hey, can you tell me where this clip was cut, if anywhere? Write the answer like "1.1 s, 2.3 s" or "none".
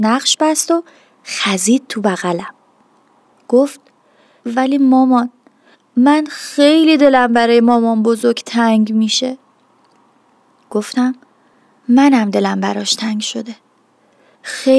none